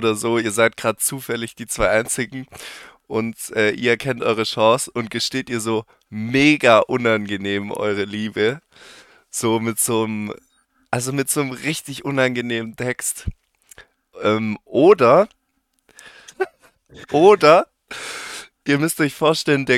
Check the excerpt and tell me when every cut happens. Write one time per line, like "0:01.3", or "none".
0:16.3